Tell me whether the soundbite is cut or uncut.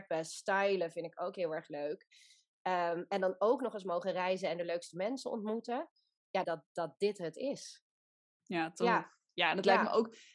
cut